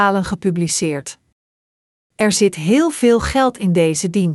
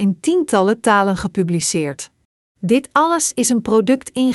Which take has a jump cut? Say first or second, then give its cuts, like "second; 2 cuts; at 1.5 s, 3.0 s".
second; 1 cut; at 2.5 s